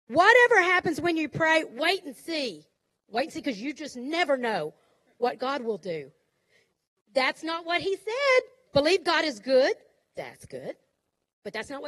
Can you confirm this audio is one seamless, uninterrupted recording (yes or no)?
no